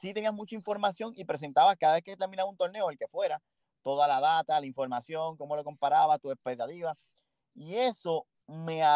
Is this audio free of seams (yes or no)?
yes